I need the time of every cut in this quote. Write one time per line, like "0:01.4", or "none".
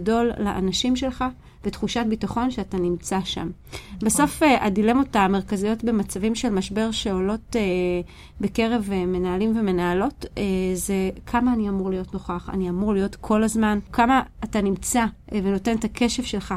none